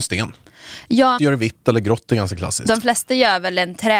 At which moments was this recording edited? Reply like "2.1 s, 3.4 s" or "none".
1.2 s